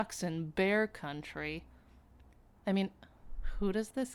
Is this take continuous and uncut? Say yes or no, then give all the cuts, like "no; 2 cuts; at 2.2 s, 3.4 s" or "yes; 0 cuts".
no; 1 cut; at 2.6 s